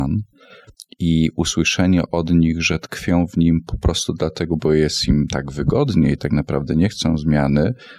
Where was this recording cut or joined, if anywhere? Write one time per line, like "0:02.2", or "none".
none